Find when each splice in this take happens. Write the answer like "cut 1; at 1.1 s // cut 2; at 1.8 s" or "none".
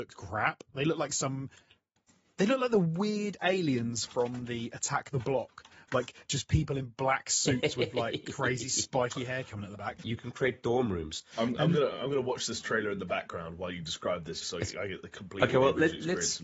cut 1; at 10.0 s // cut 2; at 11.3 s // cut 3; at 14.4 s